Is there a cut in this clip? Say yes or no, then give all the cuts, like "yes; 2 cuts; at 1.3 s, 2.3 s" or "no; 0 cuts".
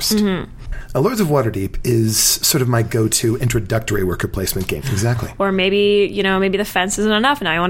yes; 1 cut; at 4.8 s